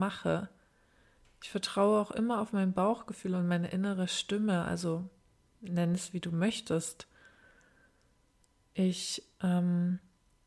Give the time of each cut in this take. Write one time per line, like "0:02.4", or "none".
none